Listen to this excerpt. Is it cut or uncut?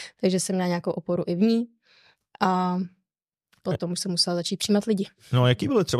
uncut